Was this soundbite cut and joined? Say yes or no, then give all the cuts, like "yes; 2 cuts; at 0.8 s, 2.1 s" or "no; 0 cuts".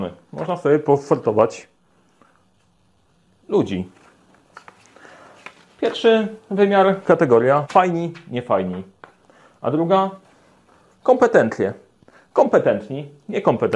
yes; 1 cut; at 7.6 s